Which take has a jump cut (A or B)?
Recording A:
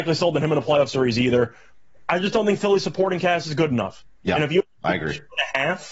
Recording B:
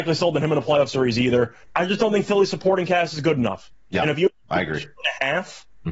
B